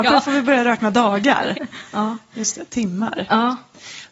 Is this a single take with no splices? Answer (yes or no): no